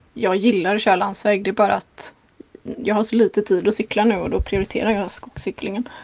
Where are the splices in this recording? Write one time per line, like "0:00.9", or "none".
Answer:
none